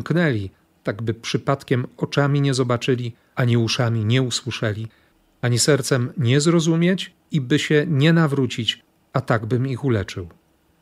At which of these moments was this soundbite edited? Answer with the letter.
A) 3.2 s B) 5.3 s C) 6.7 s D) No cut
D